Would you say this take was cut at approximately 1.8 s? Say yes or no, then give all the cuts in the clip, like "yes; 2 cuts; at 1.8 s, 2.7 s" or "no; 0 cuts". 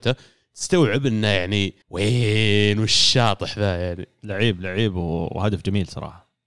yes; 1 cut; at 1.8 s